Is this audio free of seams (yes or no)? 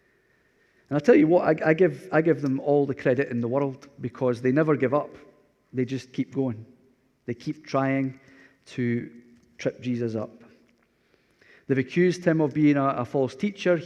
yes